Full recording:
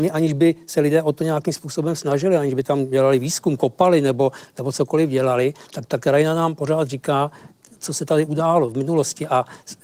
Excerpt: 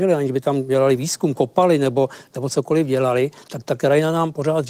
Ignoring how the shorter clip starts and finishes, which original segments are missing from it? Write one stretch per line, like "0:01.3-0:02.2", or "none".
none